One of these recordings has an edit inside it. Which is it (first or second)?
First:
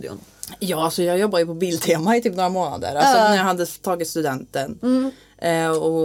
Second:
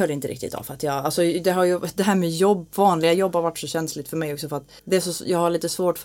second